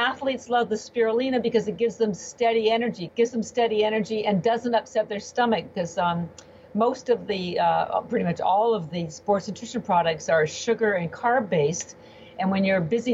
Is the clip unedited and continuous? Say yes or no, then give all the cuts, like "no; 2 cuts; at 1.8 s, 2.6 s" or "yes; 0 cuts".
no; 1 cut; at 3.1 s